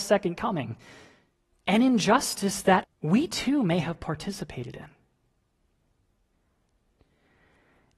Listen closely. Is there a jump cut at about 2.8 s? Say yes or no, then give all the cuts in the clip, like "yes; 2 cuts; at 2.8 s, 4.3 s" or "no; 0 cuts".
yes; 2 cuts; at 1.5 s, 2.8 s